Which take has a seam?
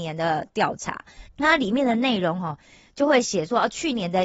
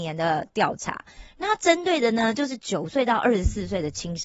first; 1 cut; at 1.3 s

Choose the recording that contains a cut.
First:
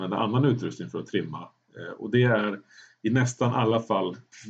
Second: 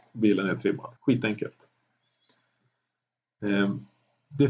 second; 1 cut; at 1.0 s

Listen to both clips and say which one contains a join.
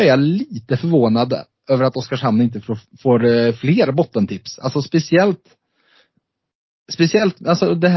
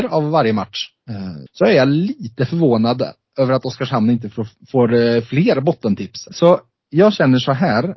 second; 2 cuts; at 1.5 s, 6.3 s

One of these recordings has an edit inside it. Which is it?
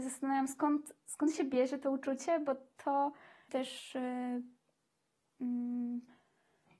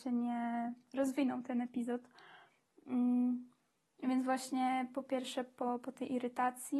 first; 1 cut; at 3.5 s

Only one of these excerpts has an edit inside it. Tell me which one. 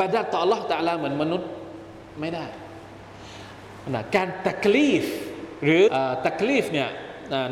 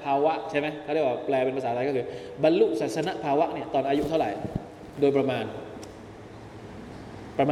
first; 1 cut; at 5.9 s

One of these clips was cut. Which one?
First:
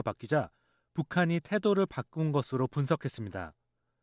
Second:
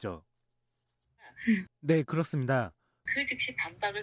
second; 2 cuts; at 1.7 s, 3.1 s

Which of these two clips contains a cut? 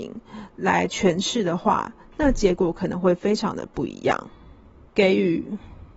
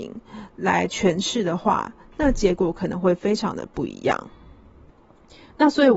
first; 1 cut; at 4.9 s

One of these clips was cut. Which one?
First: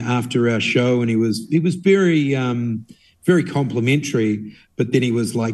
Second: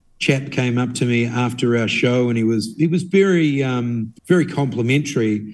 second; 1 cut; at 4.2 s

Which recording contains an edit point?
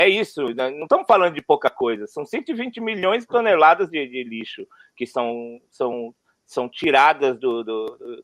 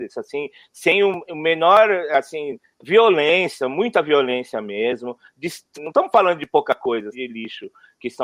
second; 2 cuts; at 5.8 s, 7.1 s

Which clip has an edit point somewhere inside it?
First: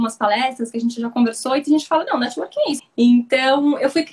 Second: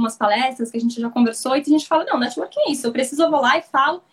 first; 1 cut; at 2.8 s

